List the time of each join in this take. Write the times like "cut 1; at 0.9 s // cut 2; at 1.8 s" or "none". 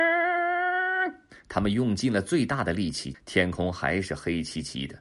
cut 1; at 3.1 s